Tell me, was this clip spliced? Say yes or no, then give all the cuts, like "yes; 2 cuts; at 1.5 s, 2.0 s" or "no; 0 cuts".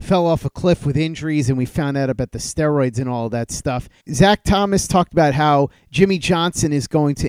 yes; 1 cut; at 4.0 s